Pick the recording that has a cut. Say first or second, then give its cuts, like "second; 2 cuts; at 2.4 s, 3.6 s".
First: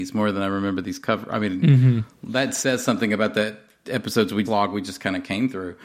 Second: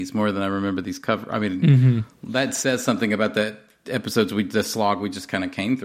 first; 1 cut; at 4.5 s